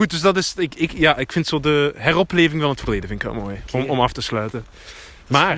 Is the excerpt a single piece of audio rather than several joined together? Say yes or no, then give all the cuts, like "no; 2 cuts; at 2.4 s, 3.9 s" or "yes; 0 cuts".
yes; 0 cuts